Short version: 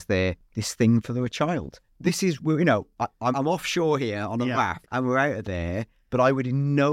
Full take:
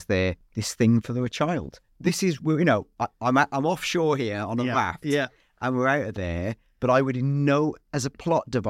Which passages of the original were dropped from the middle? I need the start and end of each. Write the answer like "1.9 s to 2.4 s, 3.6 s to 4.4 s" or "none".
3.3 s to 3.5 s, 5.0 s to 5.5 s